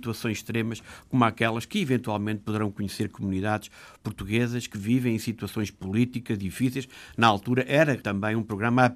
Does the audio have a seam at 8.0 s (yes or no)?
yes